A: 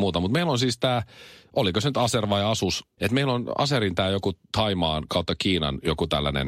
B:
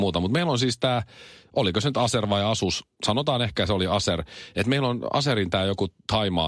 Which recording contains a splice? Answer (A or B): A